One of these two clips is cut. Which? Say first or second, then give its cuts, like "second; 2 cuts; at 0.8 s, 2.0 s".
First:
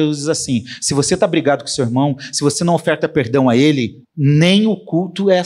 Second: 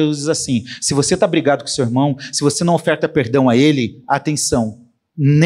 first; 1 cut; at 4.0 s